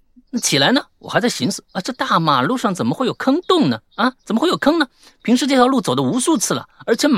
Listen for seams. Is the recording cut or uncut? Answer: uncut